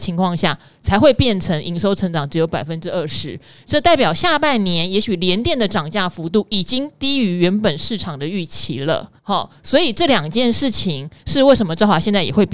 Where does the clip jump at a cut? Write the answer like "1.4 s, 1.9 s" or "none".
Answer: 9.2 s